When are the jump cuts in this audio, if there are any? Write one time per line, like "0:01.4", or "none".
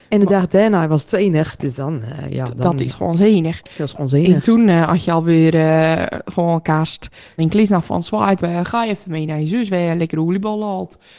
0:07.4
0:08.4